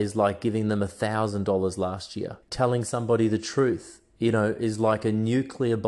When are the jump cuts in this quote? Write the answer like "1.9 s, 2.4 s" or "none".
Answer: 2.4 s